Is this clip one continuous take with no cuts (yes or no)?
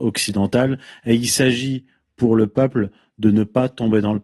yes